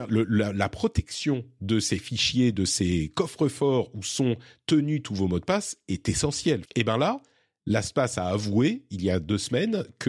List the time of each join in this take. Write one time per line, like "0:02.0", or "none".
0:06.6

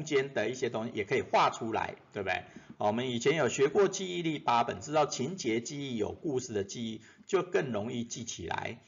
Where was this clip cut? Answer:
0:02.7

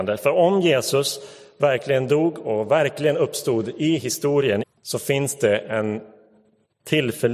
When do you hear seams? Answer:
0:04.6

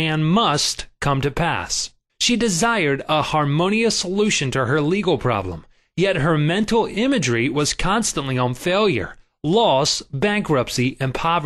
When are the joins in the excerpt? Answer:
0:02.1

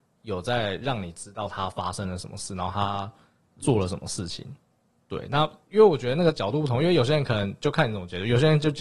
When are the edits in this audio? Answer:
none

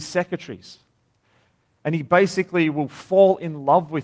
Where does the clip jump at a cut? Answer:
0:01.8

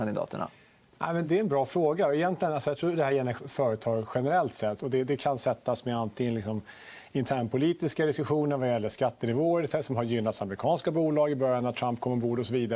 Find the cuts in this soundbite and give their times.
0:01.2
0:04.8

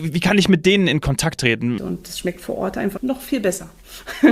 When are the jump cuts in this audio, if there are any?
0:01.8
0:03.0

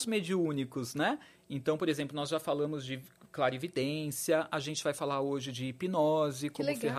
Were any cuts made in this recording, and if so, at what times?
none

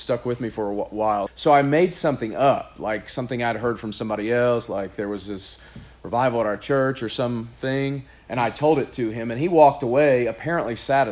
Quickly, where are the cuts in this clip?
0:01.3

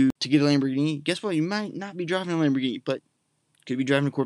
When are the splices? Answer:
none

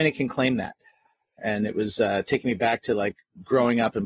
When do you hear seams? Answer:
0:01.4

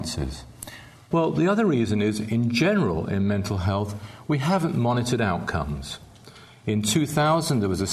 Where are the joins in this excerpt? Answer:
0:01.1

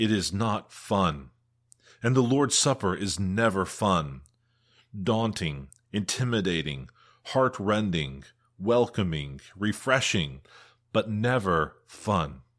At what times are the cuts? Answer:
none

